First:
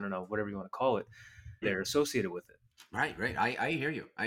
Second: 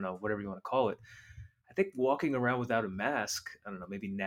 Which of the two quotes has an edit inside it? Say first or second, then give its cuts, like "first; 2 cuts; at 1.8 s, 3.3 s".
first; 1 cut; at 1.6 s